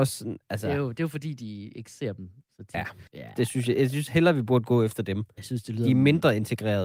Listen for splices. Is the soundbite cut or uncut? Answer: cut